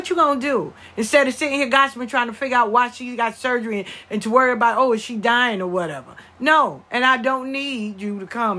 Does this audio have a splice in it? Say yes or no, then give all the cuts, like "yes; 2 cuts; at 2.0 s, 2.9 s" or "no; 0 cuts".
no; 0 cuts